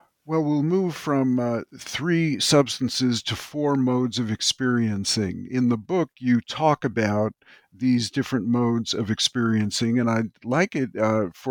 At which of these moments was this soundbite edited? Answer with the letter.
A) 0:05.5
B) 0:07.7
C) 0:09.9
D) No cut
D